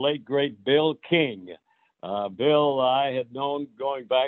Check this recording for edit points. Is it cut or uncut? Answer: uncut